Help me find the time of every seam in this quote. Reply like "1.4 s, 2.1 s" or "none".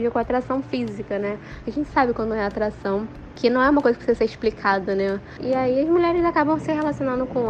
1.6 s, 5.4 s